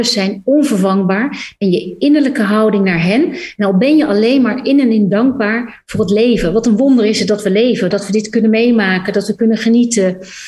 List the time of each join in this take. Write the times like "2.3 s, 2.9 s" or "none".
7.9 s